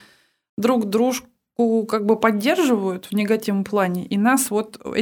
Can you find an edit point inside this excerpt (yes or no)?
no